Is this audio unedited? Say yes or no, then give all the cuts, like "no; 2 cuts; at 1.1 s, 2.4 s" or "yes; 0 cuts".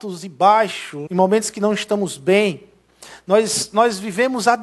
no; 1 cut; at 1.1 s